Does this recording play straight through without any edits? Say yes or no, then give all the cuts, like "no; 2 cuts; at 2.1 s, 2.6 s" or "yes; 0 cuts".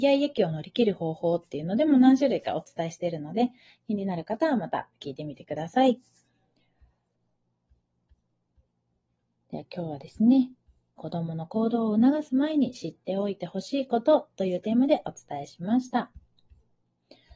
no; 1 cut; at 11.0 s